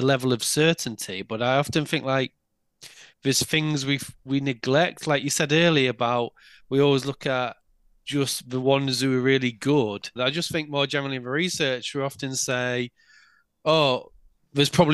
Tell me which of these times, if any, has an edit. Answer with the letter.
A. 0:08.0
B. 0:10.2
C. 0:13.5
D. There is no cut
B